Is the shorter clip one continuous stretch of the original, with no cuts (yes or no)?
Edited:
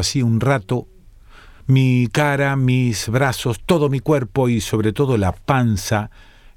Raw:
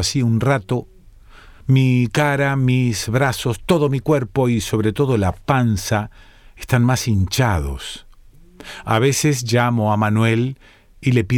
yes